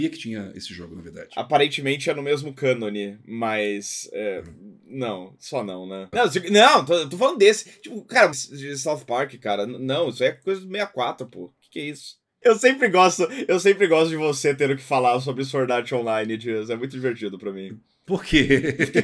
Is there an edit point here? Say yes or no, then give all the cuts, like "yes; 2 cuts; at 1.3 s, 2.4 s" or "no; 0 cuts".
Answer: yes; 3 cuts; at 6.1 s, 8.3 s, 12.4 s